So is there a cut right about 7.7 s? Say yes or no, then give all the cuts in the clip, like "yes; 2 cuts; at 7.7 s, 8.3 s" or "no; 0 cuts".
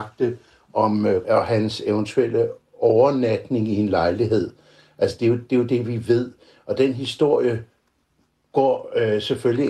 no; 1 cut; at 1.2 s